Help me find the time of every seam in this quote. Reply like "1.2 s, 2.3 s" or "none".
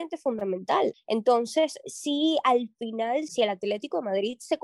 0.9 s, 3.3 s